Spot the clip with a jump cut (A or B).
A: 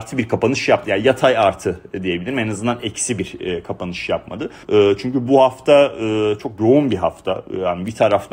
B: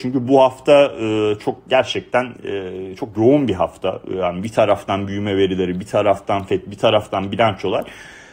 A